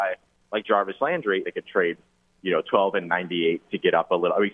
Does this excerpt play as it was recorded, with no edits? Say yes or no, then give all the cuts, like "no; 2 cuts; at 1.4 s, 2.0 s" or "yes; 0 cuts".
no; 1 cut; at 1.4 s